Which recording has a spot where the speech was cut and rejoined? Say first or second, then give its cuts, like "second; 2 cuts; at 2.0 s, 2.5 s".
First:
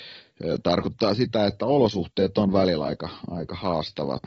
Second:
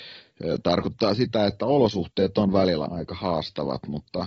second; 1 cut; at 2.9 s